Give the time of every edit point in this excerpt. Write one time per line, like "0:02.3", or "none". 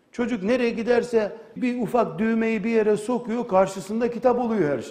0:01.6